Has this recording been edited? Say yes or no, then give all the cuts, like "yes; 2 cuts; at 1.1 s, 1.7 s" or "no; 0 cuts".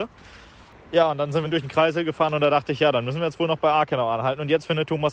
yes; 1 cut; at 1.4 s